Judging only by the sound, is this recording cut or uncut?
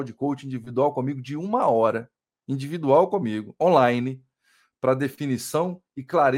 uncut